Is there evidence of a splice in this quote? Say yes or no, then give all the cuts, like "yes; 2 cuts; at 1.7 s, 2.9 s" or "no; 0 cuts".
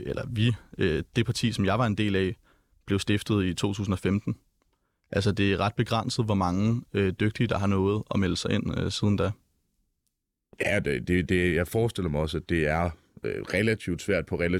no; 0 cuts